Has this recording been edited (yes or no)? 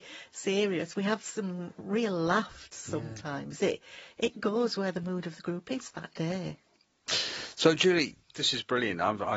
no